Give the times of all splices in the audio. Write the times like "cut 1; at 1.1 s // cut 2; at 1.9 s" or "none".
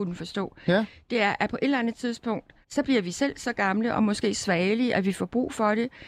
cut 1; at 2.6 s